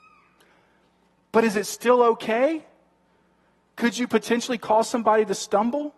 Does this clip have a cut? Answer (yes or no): no